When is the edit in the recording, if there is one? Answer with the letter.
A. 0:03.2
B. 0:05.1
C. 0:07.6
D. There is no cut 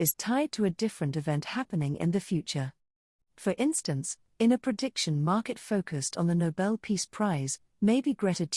A